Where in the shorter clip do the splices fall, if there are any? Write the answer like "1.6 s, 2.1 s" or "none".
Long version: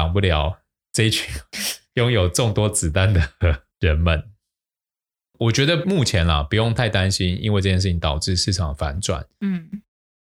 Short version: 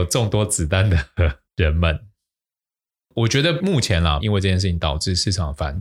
4.2 s